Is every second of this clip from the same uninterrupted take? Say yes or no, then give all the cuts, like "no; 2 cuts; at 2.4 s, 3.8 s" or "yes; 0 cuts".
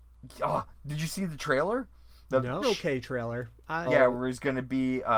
no; 2 cuts; at 2.6 s, 3.9 s